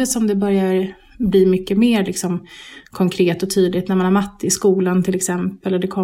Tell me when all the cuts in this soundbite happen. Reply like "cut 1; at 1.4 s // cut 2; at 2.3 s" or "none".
none